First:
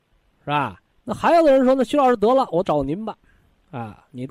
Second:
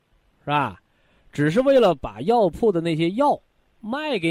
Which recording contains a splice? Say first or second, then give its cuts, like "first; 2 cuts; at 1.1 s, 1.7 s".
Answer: first; 1 cut; at 0.9 s